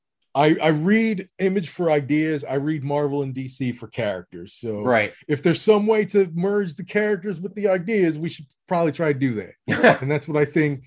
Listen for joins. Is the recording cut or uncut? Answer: uncut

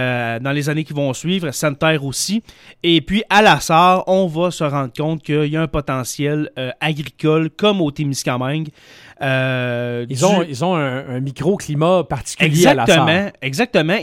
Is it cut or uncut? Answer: uncut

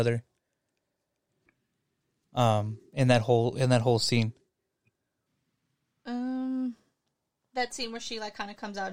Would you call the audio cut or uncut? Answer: uncut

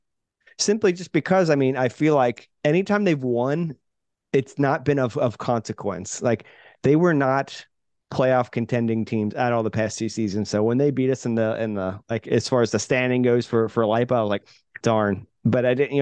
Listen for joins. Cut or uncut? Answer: cut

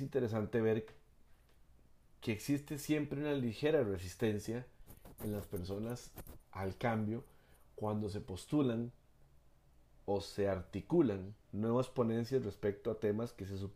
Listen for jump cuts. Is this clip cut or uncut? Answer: cut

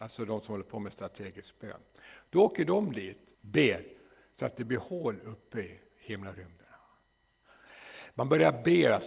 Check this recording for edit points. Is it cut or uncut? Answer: cut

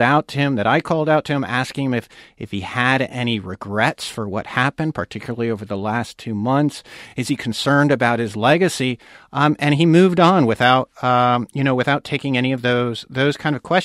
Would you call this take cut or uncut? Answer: uncut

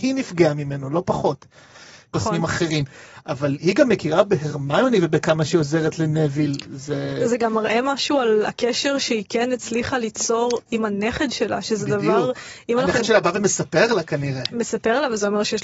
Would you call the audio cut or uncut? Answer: cut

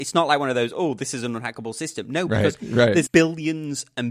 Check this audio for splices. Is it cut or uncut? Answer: cut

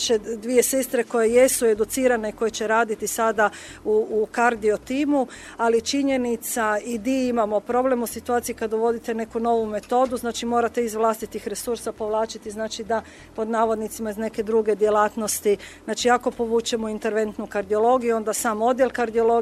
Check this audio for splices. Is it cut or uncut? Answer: uncut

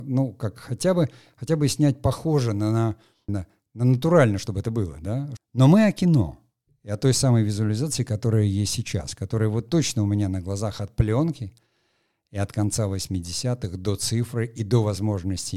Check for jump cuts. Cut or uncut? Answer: cut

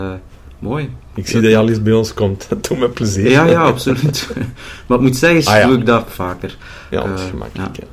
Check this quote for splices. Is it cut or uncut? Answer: cut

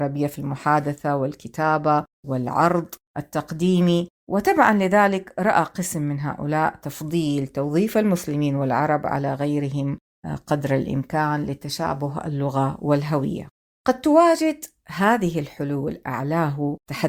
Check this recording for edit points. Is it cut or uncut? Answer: uncut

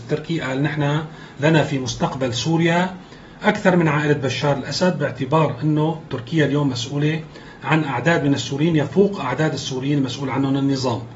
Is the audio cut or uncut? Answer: uncut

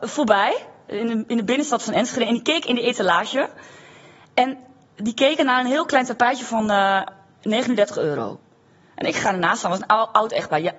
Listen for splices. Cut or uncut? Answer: uncut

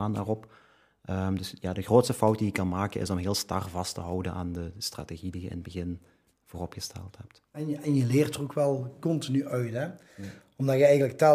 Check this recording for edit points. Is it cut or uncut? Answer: cut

